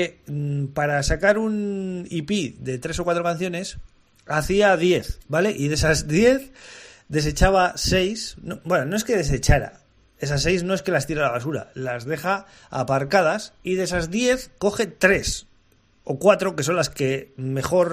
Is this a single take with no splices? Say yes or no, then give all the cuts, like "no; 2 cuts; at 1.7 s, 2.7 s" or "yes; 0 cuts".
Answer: yes; 0 cuts